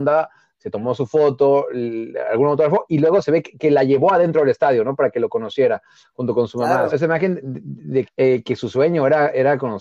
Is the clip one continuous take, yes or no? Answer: no